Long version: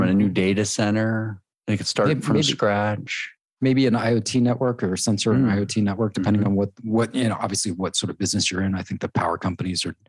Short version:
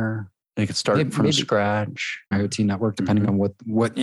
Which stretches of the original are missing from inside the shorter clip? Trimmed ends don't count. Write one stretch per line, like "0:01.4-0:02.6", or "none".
0:03.4-0:05.5